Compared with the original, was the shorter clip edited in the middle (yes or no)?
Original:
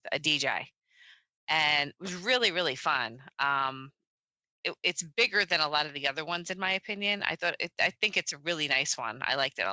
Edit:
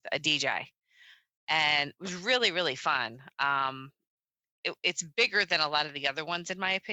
no